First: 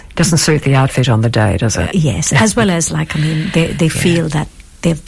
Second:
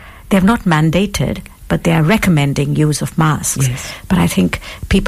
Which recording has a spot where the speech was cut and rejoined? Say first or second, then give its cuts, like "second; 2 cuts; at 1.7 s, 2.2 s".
first; 1 cut; at 1.9 s